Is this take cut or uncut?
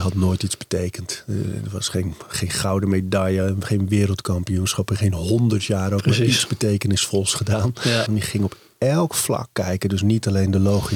cut